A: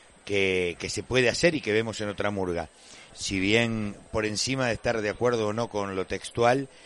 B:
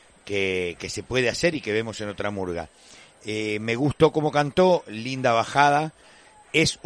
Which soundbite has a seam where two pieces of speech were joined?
A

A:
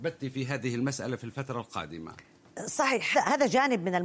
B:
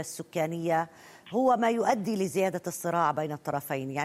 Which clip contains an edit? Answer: A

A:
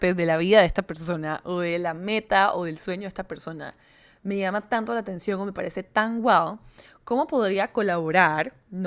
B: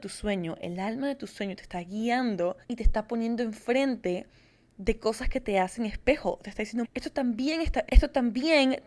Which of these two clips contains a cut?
B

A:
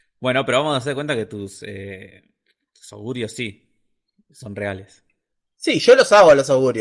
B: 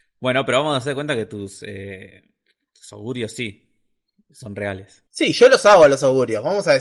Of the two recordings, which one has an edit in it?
B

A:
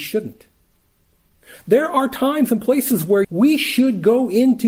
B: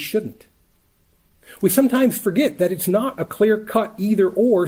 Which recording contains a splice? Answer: A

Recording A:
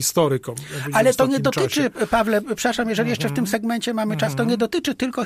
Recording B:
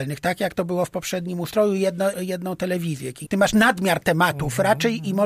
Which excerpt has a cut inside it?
B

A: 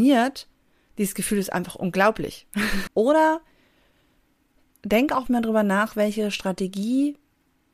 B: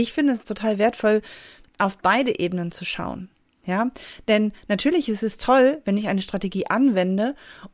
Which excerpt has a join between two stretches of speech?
A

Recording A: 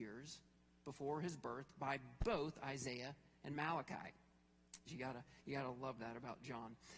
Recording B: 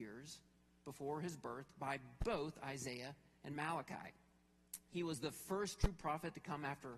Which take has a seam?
A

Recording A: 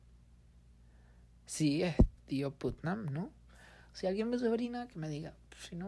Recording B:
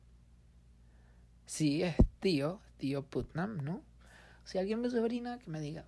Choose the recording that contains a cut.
A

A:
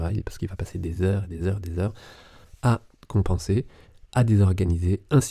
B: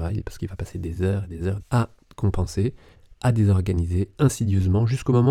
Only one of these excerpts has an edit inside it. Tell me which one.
B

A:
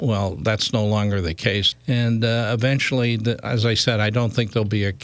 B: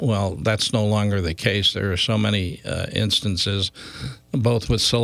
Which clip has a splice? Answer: A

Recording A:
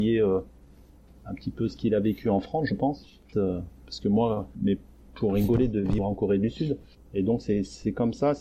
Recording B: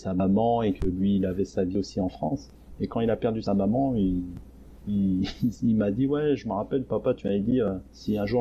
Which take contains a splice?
A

